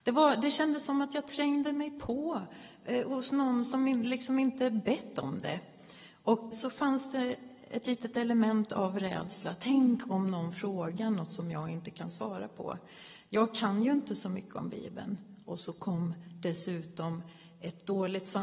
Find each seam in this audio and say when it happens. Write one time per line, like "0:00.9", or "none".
0:06.5